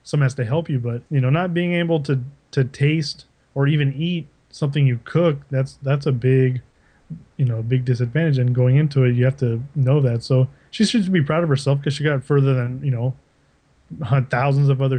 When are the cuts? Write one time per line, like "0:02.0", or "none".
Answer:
0:01.1